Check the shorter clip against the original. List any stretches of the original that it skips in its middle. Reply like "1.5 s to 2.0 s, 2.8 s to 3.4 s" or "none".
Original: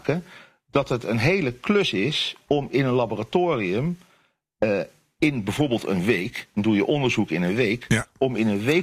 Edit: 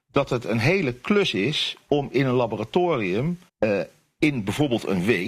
4.1 s to 4.5 s